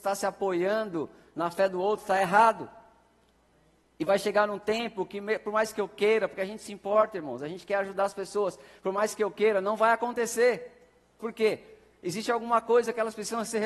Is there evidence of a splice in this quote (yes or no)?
yes